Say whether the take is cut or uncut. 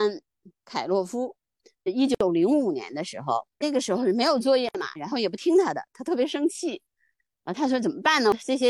cut